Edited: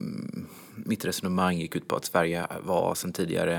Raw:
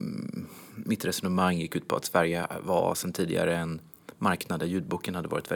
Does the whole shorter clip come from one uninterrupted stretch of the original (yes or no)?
yes